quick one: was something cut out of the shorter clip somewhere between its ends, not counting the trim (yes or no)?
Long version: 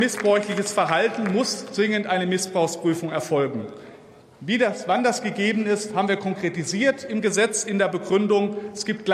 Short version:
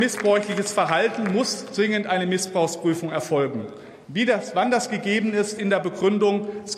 yes